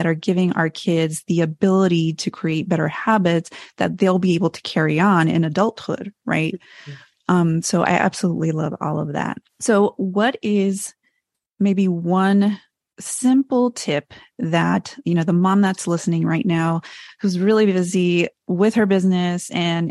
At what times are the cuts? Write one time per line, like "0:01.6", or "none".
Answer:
0:09.5